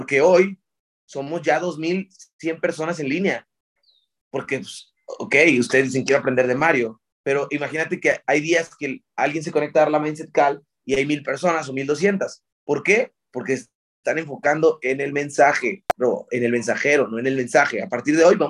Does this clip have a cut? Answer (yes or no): no